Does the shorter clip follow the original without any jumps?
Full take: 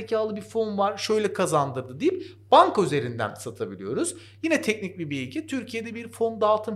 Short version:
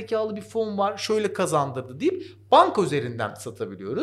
yes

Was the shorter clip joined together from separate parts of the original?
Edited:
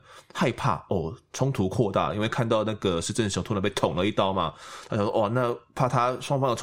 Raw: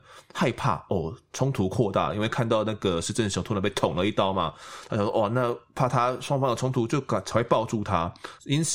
no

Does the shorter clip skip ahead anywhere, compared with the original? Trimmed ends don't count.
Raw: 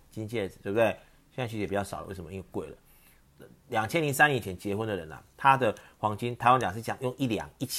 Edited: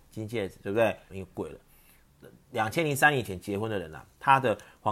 yes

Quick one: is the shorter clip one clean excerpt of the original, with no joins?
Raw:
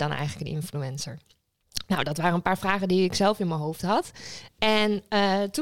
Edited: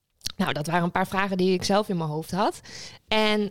yes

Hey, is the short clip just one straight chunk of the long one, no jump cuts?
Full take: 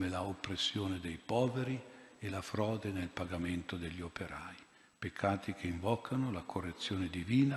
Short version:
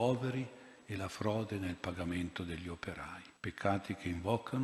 no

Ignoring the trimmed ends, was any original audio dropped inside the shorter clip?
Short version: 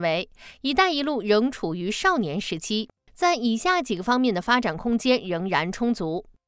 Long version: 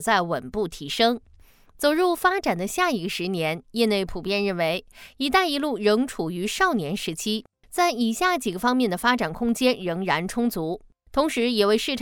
no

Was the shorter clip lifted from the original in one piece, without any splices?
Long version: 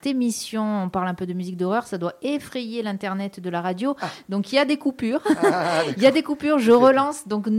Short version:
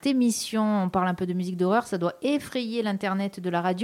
yes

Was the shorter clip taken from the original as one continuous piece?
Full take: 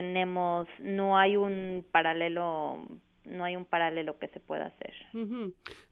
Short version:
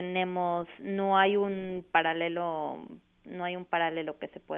yes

